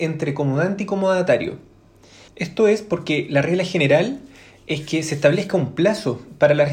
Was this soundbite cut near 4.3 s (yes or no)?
no